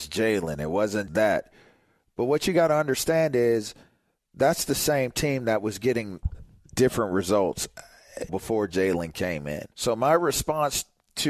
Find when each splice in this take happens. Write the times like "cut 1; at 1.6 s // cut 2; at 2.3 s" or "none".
cut 1; at 1.1 s // cut 2; at 8.3 s // cut 3; at 9.7 s